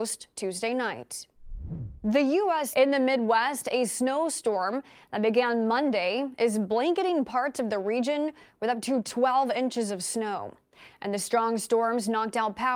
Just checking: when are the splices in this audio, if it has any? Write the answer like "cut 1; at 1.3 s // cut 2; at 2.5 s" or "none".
cut 1; at 2.7 s